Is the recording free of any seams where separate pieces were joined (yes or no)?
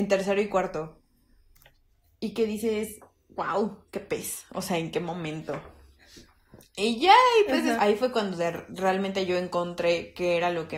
no